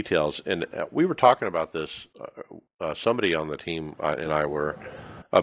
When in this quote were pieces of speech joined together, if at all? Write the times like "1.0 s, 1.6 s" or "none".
none